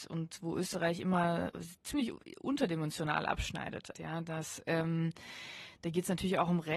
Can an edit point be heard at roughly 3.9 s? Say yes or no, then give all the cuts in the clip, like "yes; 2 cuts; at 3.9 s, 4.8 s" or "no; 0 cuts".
yes; 1 cut; at 3.9 s